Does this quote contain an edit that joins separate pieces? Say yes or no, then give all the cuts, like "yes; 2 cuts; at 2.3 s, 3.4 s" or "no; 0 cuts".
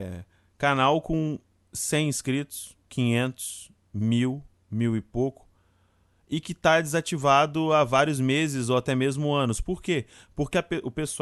no; 0 cuts